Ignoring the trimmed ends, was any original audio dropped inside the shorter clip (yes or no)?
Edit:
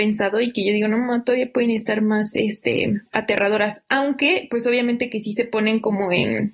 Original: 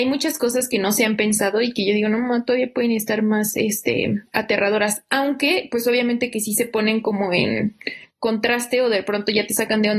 no